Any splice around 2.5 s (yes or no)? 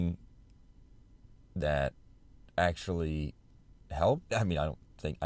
no